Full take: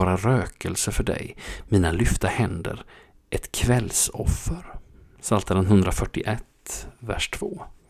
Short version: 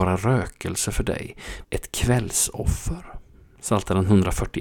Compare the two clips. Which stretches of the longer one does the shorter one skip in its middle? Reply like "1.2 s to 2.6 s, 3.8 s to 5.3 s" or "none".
1.6 s to 3.2 s